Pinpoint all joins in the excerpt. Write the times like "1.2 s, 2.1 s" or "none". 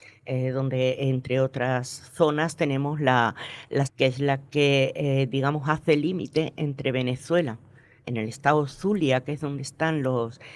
3.9 s